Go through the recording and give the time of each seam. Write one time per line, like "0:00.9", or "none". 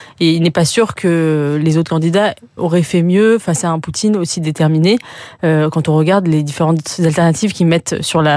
0:02.6